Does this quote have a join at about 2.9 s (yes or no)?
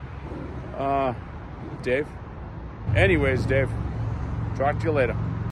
yes